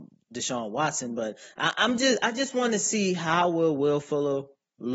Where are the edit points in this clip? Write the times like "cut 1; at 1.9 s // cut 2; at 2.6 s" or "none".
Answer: none